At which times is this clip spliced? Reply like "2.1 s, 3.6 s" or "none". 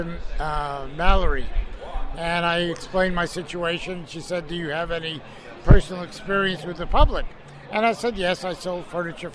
2.1 s